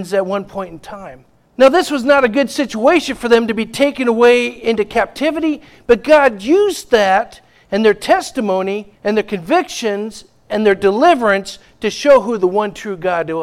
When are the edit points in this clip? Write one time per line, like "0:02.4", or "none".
0:01.5
0:09.0